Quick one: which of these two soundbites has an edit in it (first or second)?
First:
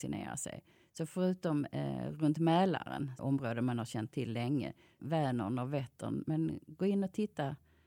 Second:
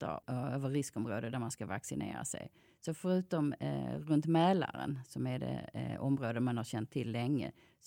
first